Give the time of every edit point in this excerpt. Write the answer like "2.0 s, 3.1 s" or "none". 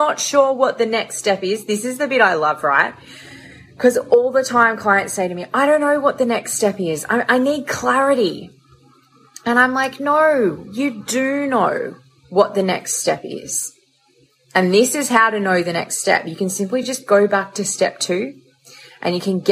none